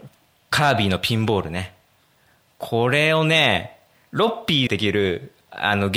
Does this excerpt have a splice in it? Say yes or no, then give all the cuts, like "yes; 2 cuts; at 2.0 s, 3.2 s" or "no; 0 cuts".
yes; 1 cut; at 4.7 s